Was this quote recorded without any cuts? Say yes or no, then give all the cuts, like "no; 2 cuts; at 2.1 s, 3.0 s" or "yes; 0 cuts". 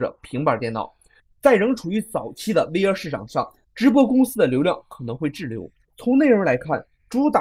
no; 1 cut; at 5.8 s